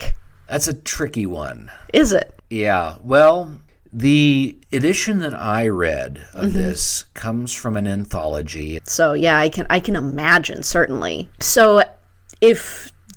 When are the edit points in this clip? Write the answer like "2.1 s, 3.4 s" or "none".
4.6 s, 8.8 s